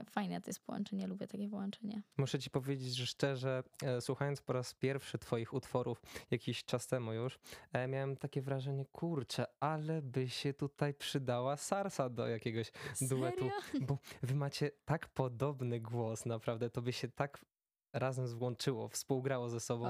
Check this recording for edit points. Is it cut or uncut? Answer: uncut